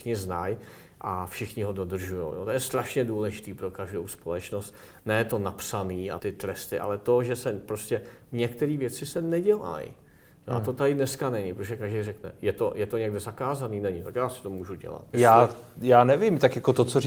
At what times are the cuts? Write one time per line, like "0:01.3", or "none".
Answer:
0:06.2
0:15.1